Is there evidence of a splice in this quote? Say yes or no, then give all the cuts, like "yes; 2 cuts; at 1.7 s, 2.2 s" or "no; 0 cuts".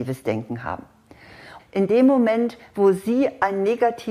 yes; 1 cut; at 1.6 s